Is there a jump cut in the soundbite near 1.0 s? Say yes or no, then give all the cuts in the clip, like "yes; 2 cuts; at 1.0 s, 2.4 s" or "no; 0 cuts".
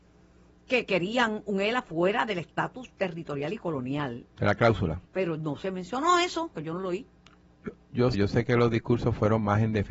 no; 3 cuts; at 5.1 s, 6.5 s, 8.1 s